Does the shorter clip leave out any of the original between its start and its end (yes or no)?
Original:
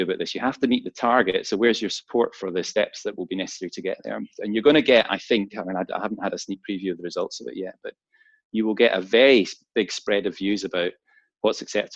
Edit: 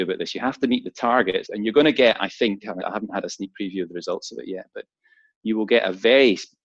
yes